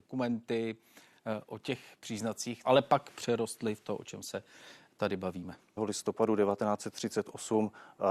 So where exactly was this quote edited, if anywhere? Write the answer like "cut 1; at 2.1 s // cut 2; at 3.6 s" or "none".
cut 1; at 2.6 s // cut 2; at 5.8 s

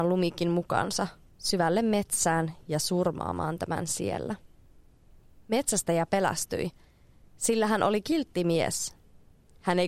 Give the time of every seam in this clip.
none

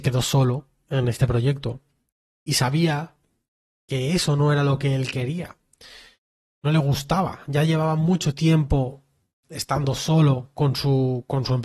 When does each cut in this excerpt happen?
none

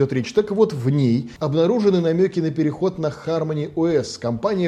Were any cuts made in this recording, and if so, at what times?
none

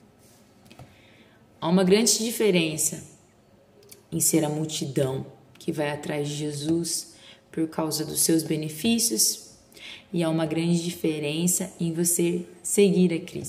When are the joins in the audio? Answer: none

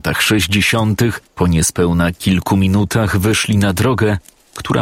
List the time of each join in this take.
cut 1; at 1.3 s

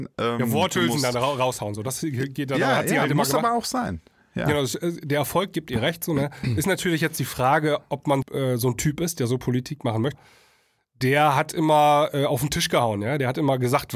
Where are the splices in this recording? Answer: cut 1; at 8.2 s // cut 2; at 10.1 s

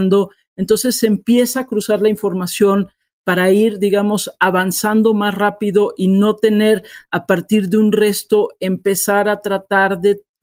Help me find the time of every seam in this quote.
none

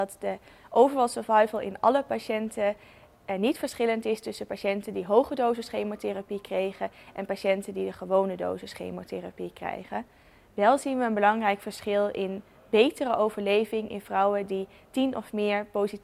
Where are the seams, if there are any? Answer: none

